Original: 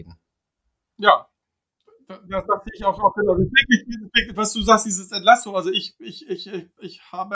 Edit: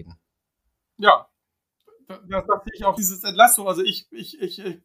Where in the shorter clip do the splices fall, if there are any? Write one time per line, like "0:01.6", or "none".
0:03.0